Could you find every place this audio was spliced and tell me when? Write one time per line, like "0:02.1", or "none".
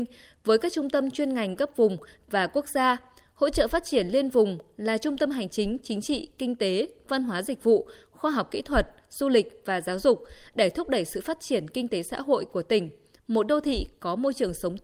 none